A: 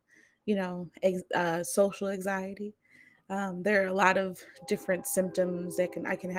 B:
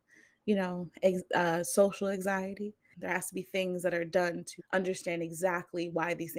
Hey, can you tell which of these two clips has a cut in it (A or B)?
B